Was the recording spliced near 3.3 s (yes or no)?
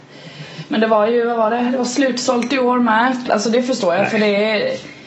yes